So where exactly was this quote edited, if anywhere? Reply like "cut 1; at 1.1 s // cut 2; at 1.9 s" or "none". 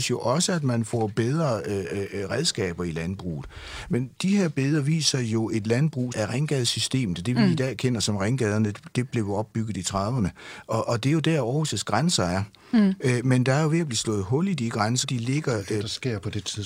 cut 1; at 6.1 s // cut 2; at 15.0 s